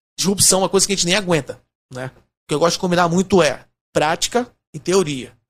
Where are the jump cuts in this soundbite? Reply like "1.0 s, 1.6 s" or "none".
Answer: 2.2 s